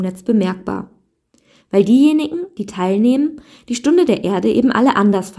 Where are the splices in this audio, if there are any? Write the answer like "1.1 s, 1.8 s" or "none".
1.6 s